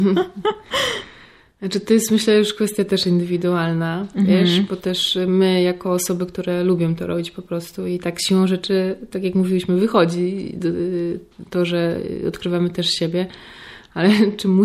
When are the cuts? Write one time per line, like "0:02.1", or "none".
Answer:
none